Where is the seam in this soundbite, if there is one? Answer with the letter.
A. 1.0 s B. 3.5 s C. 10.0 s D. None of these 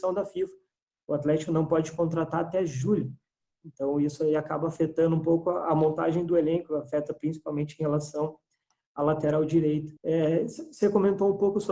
C